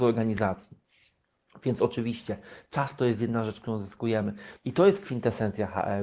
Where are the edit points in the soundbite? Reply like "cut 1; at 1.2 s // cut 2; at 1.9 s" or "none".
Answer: cut 1; at 4.6 s